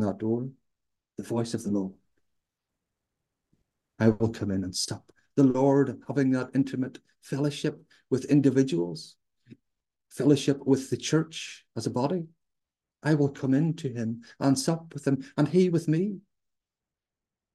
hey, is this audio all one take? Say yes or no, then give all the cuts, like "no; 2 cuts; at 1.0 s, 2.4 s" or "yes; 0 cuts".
no; 1 cut; at 5.3 s